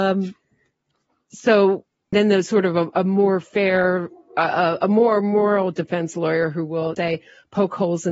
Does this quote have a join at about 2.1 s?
yes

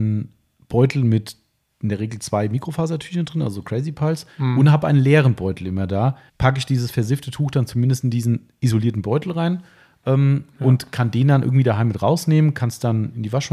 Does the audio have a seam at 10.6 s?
no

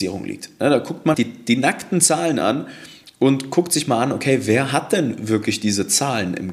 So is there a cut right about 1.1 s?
yes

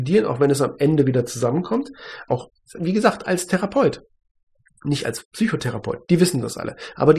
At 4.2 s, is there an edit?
no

